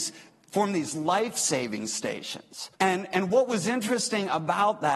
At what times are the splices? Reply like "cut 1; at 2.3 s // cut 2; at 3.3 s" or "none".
cut 1; at 2.7 s